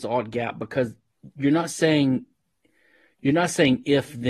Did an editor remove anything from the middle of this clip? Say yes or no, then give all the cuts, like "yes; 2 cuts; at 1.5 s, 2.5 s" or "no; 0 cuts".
no; 0 cuts